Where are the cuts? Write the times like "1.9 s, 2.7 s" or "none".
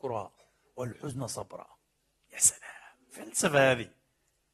none